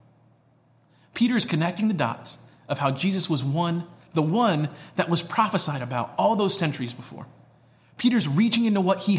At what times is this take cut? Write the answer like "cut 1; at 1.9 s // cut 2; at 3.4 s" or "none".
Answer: none